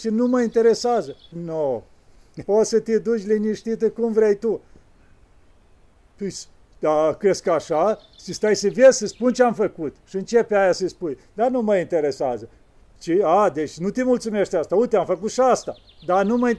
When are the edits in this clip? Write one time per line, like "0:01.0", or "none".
0:01.3